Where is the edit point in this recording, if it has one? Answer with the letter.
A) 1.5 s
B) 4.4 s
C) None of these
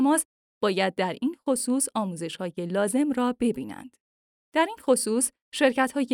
B